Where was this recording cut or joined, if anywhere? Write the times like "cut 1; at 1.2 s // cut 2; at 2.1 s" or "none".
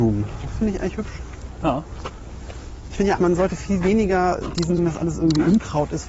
cut 1; at 3.2 s // cut 2; at 4.8 s